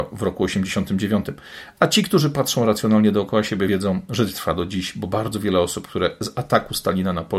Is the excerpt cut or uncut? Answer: uncut